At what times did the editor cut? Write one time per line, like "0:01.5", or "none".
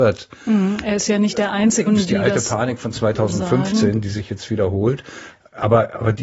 0:01.9